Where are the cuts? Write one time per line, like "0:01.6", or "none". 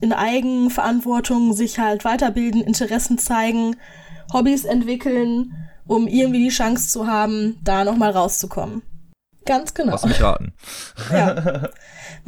0:09.3